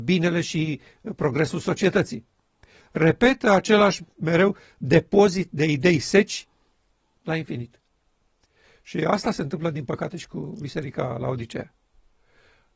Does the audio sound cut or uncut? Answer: uncut